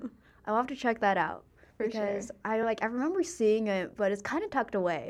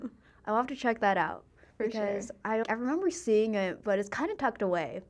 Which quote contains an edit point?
second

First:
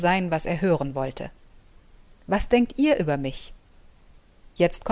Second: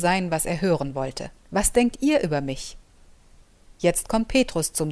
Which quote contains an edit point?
second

